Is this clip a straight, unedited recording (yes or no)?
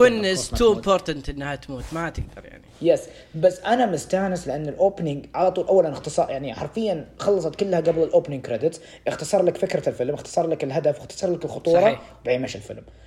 yes